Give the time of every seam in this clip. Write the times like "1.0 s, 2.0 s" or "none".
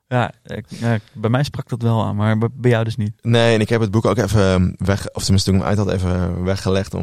none